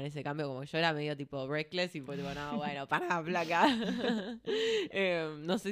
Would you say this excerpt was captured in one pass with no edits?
yes; 0 cuts

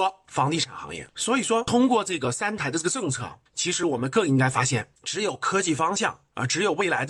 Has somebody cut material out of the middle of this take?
no; 0 cuts

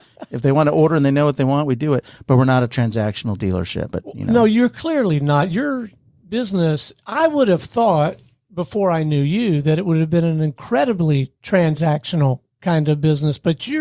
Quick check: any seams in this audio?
yes; 1 cut; at 3.9 s

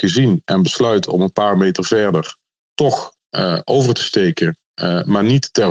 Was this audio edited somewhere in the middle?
no; 0 cuts

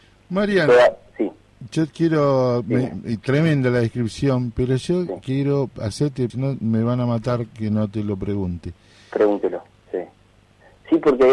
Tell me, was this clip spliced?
yes; 2 cuts; at 6.3 s, 9.7 s

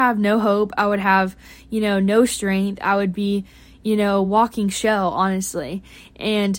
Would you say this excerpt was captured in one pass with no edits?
yes; 0 cuts

